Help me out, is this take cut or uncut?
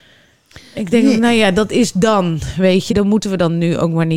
cut